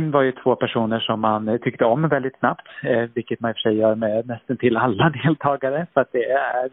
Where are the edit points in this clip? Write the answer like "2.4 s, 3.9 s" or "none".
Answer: none